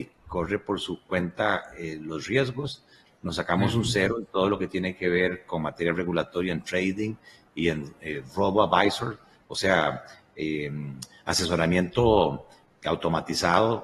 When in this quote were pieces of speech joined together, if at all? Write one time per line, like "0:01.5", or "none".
0:03.1